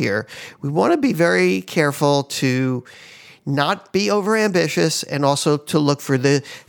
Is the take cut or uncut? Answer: uncut